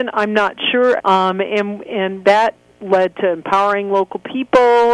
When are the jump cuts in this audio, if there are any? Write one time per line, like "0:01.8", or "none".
0:01.0
0:02.2